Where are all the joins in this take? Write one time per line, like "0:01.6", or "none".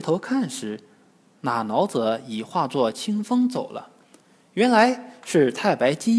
none